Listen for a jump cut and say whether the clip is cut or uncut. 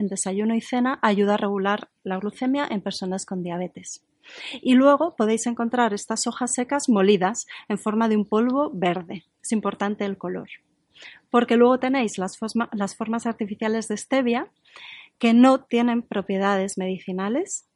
uncut